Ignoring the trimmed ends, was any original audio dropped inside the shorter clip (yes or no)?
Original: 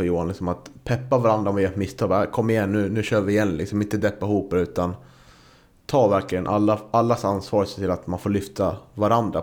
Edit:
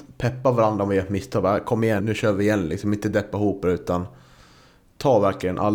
yes